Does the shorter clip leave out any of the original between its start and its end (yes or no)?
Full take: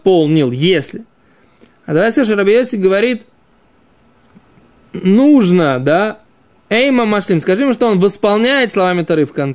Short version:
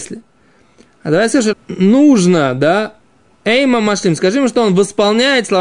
yes